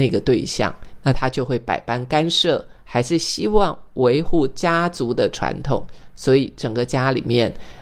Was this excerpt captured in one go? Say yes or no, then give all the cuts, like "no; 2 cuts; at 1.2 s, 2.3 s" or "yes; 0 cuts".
yes; 0 cuts